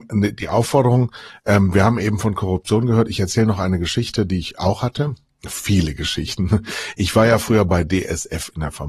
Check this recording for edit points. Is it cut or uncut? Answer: uncut